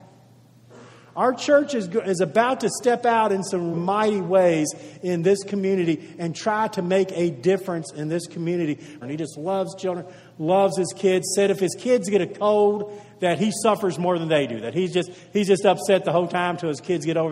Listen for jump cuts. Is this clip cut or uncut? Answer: cut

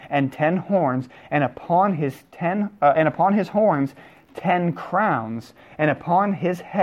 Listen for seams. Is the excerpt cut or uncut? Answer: uncut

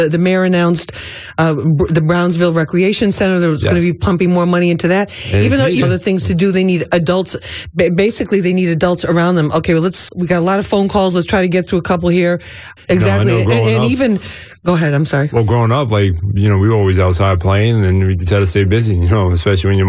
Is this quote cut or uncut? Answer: cut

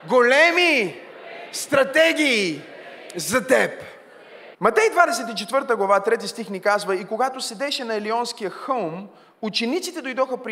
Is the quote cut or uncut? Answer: cut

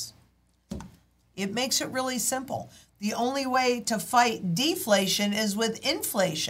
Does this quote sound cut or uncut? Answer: cut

